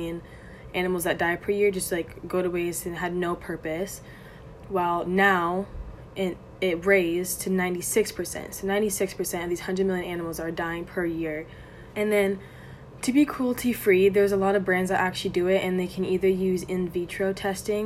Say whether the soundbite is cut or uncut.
cut